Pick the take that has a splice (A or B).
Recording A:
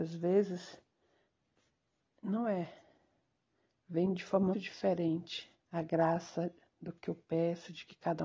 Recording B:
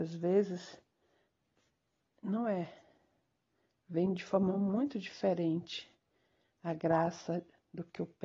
A